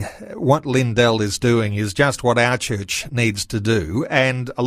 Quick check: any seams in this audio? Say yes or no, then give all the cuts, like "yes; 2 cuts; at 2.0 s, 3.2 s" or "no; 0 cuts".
no; 0 cuts